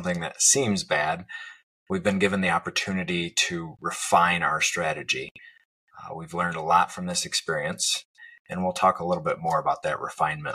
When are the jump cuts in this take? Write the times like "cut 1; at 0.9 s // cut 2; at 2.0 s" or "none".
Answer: none